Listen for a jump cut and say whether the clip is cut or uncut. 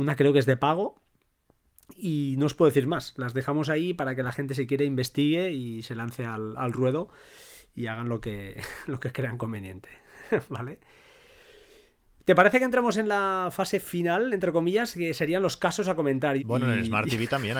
cut